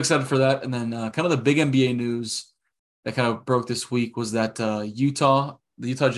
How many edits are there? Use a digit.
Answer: 0